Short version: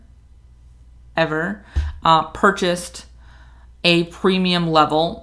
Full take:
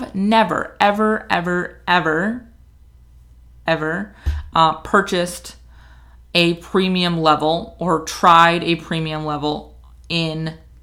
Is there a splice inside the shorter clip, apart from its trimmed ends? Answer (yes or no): no